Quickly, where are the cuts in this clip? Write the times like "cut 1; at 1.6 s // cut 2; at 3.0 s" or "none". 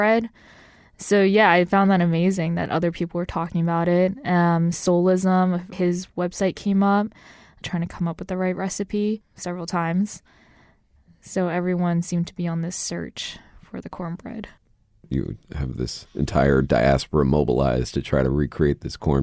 cut 1; at 5.7 s // cut 2; at 7.6 s